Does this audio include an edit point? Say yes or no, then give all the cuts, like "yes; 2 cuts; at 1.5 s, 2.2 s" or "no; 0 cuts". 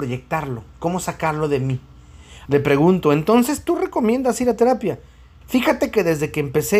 yes; 2 cuts; at 2.5 s, 5.4 s